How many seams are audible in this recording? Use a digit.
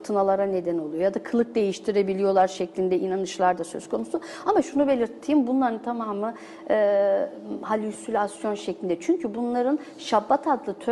0